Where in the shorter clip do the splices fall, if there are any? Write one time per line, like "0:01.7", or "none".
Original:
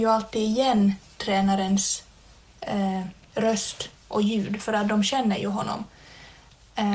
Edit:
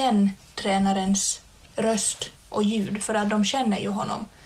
0:01.6